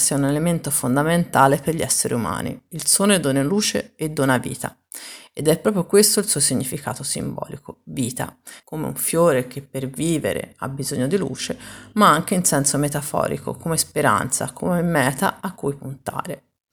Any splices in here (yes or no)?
yes